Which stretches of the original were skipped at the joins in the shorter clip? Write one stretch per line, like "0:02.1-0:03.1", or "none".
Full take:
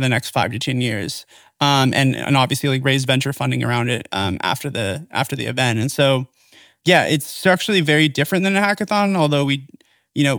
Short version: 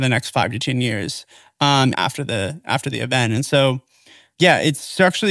0:01.9-0:04.4